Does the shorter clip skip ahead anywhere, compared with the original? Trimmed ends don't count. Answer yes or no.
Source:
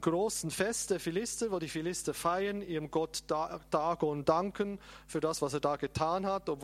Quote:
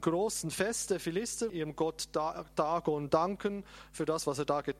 yes